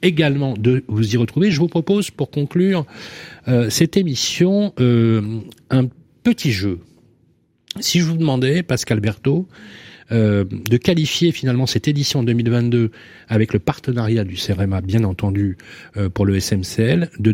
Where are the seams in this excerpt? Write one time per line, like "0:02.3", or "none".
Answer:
none